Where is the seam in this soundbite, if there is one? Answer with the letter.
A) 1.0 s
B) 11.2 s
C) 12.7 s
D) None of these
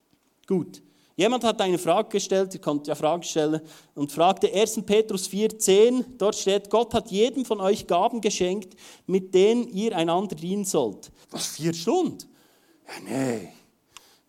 B